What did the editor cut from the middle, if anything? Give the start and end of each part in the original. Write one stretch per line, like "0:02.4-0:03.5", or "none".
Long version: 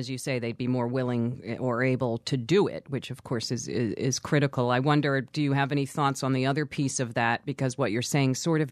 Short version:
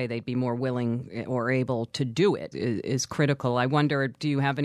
0:02.8-0:03.6

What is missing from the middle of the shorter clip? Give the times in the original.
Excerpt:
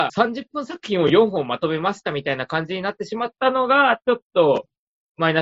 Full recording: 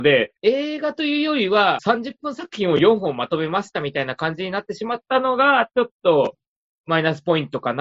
none

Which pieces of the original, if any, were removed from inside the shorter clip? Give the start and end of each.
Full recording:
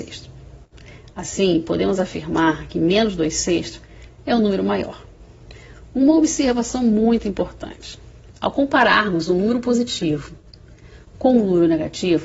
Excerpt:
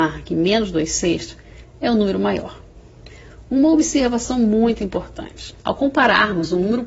0:08.0-0:08.4

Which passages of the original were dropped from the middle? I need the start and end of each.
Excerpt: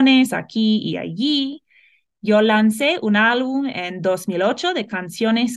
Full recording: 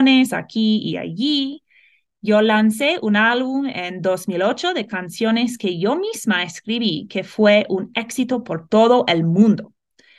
none

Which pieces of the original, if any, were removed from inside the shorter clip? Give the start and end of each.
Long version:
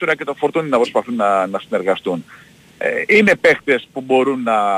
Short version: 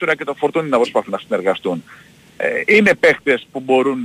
0:01.1-0:01.5

